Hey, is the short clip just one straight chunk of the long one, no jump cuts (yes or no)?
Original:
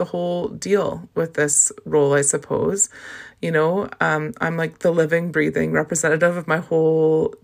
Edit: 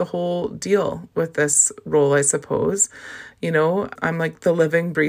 no